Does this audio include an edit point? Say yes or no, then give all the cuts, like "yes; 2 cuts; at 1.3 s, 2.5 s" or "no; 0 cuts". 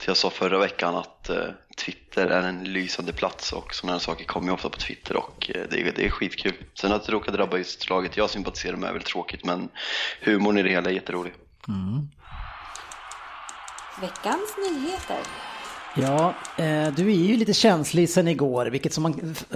no; 0 cuts